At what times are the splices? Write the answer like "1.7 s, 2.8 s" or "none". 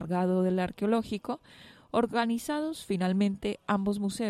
none